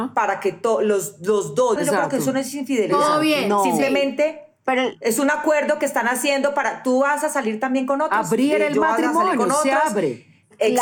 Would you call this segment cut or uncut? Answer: cut